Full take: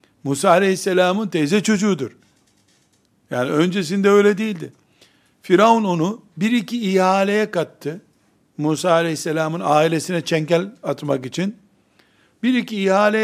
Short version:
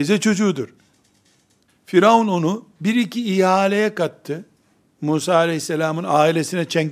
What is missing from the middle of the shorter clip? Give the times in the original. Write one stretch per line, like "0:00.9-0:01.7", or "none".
0:03.1-0:05.2